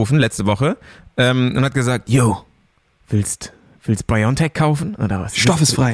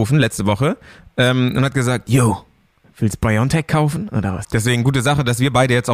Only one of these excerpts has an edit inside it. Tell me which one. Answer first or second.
second